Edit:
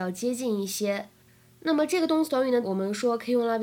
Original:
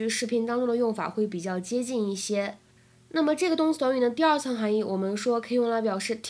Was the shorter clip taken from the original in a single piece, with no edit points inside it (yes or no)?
no